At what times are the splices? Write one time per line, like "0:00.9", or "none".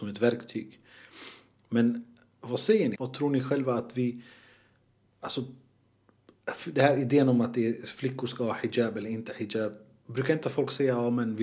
0:02.9